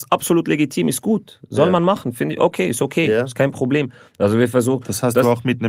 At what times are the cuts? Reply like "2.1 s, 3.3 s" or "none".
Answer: 4.1 s